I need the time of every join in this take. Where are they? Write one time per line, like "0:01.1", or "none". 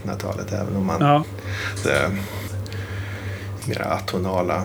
0:01.8
0:03.6